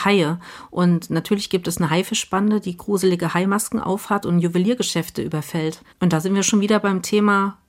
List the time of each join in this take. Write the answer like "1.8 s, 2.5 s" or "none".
5.9 s